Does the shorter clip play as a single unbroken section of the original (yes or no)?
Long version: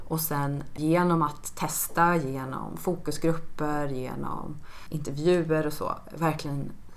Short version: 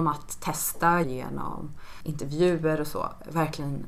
no